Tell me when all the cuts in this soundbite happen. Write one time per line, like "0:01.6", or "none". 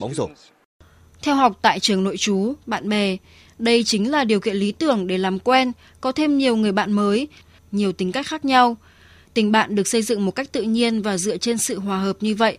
0:02.6
0:07.6